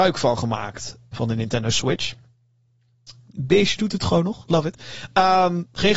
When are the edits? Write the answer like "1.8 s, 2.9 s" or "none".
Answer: 1.1 s, 3.2 s